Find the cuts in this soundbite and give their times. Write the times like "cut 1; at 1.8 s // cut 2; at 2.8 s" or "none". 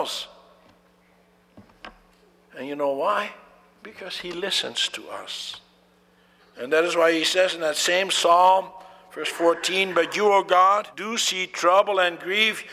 cut 1; at 6.4 s // cut 2; at 10.9 s